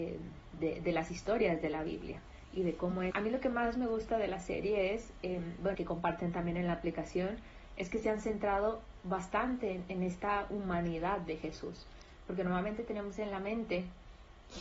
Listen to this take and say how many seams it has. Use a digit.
2